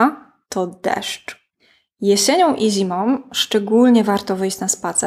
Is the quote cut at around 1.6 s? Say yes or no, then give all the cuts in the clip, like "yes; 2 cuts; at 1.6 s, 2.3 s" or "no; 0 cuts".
no; 0 cuts